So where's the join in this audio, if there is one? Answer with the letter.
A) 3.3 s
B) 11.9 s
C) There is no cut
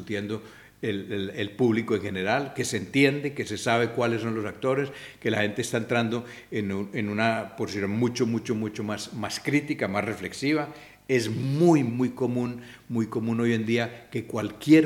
B